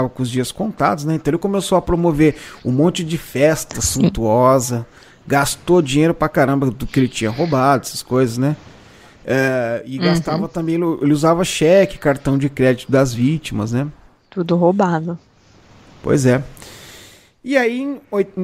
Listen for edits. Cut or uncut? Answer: uncut